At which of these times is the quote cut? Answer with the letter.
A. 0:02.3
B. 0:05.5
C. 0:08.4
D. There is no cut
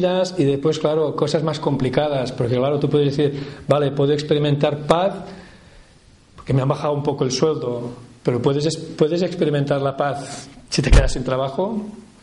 D